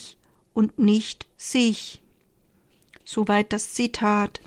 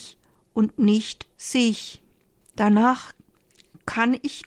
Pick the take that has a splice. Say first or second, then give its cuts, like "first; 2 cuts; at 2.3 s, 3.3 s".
second; 1 cut; at 2.4 s